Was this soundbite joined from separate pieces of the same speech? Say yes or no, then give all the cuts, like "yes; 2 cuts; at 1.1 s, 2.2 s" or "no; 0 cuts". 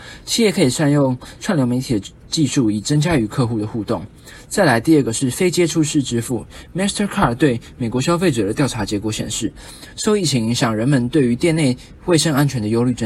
no; 0 cuts